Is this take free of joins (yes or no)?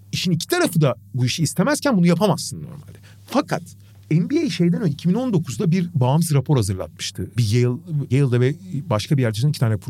yes